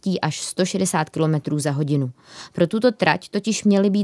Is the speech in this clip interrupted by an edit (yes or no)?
no